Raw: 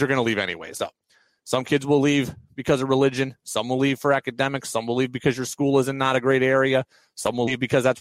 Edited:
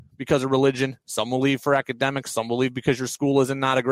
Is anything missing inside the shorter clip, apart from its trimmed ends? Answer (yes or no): no